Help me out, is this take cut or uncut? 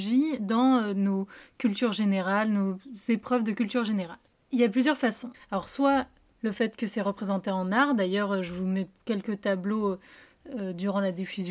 cut